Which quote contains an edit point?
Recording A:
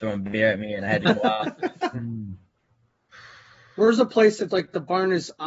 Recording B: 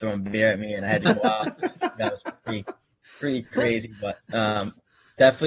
A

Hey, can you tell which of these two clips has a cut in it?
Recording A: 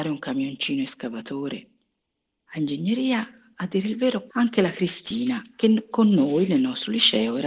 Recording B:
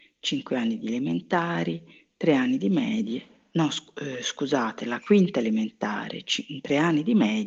A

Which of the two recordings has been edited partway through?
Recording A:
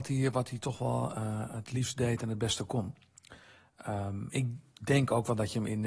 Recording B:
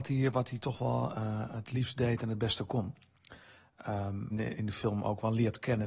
B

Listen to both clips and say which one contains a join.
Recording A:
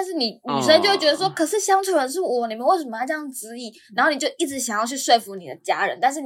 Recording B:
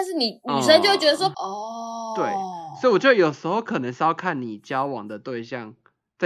B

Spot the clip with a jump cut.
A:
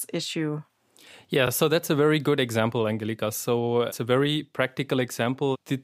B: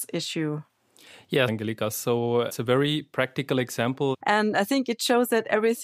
B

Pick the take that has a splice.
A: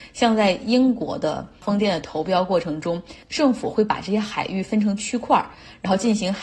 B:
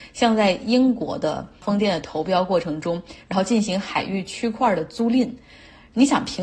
B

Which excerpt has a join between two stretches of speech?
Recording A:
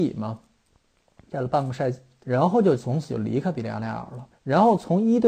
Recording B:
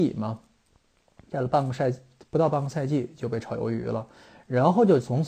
A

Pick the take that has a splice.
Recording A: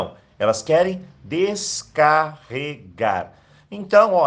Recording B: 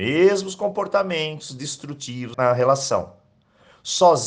B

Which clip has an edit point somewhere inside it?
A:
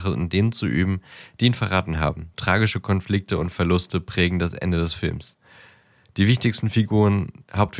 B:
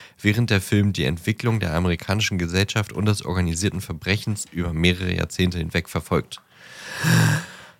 A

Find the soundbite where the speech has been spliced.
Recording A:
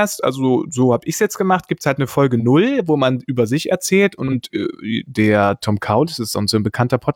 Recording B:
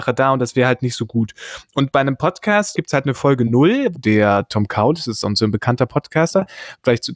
B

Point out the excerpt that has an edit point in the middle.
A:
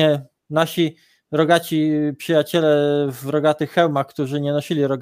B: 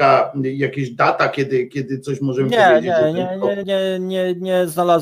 B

